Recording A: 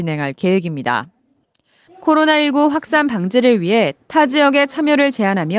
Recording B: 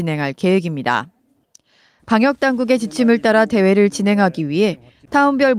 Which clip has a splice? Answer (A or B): A